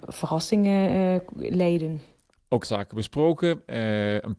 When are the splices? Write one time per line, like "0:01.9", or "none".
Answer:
0:02.6